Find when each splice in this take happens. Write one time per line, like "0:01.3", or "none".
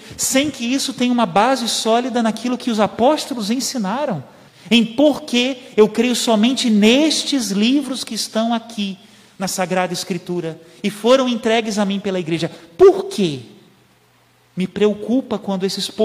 0:04.5